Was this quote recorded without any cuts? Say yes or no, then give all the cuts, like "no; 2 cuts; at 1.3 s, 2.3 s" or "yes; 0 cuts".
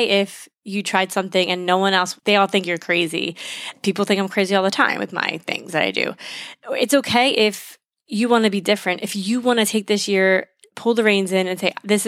no; 1 cut; at 2.2 s